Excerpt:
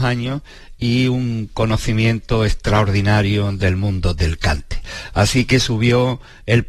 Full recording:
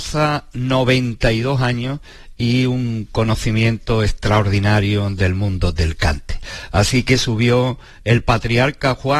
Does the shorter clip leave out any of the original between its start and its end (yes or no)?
no